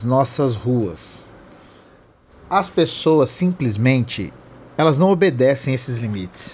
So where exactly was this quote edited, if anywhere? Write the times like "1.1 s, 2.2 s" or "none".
none